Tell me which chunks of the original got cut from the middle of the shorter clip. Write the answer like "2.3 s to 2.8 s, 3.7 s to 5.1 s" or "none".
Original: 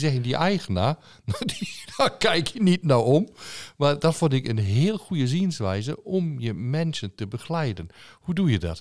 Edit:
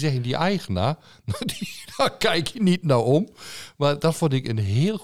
none